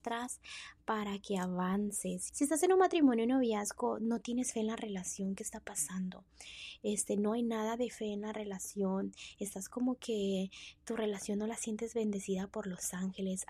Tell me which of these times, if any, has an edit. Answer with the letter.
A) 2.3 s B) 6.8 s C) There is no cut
A